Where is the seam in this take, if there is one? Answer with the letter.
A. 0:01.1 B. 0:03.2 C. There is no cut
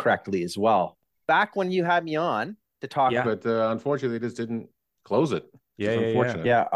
B